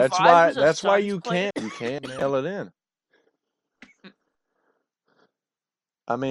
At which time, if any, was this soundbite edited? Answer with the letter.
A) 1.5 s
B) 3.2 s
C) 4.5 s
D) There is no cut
A